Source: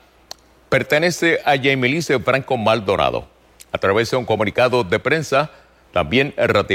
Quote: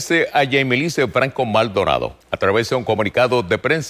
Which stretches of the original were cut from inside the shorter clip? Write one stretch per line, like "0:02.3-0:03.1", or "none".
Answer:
0:03.3-0:03.6

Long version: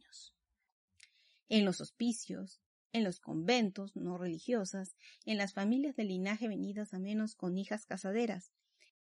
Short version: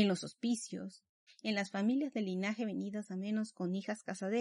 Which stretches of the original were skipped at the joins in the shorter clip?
0:02.8-0:05.1

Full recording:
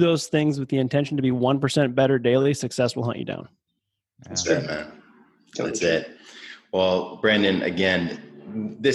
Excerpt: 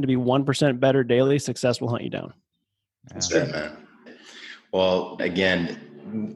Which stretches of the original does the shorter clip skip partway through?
0:05.2-0:06.1
0:07.2-0:07.6

